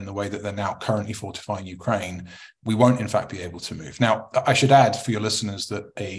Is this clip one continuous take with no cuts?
yes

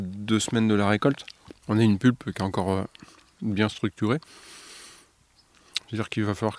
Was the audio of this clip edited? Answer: yes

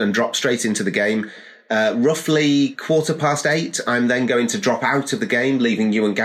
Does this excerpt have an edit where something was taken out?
no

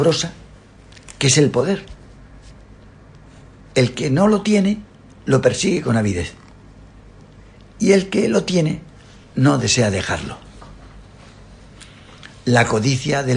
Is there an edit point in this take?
no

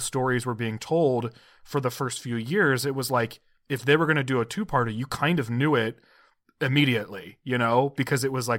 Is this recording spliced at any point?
no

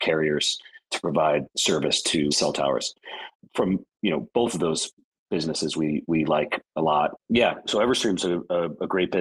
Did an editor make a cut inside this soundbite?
yes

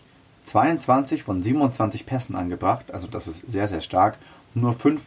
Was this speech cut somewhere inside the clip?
no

